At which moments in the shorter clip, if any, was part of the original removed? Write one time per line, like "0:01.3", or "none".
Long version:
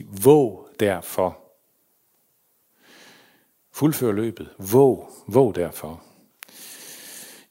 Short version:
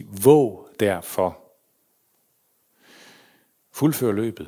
none